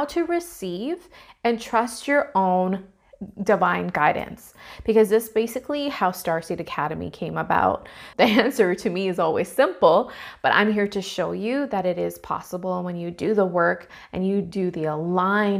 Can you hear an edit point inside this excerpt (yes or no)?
yes